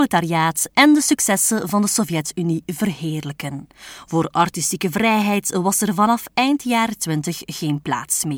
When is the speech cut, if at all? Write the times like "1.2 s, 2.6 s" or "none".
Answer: none